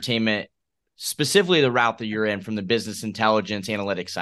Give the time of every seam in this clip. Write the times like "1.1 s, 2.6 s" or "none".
none